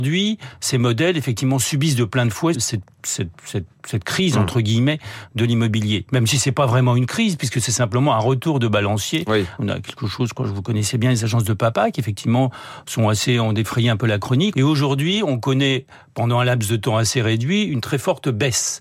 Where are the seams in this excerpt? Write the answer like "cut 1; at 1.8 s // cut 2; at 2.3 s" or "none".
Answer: cut 1; at 2.5 s // cut 2; at 9.6 s // cut 3; at 14.5 s